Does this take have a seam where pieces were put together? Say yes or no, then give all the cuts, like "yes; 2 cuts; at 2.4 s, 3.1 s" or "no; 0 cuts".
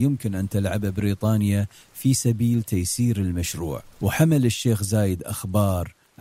yes; 1 cut; at 3.9 s